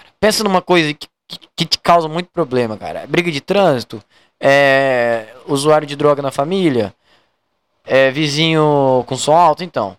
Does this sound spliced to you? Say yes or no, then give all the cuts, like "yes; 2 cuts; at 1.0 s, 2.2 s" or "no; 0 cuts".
no; 0 cuts